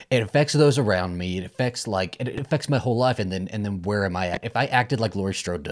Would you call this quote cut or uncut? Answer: uncut